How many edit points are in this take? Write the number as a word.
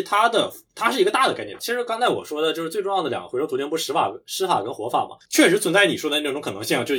two